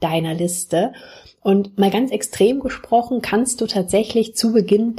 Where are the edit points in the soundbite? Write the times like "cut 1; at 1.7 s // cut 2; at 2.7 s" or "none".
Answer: none